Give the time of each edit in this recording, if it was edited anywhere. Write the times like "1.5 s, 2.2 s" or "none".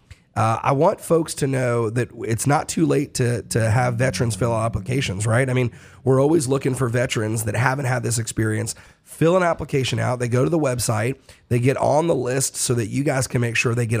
none